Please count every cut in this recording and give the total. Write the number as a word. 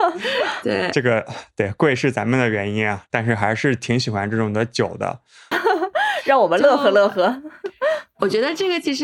one